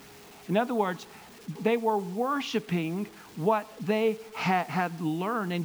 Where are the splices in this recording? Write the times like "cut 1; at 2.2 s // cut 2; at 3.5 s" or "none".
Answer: cut 1; at 1.5 s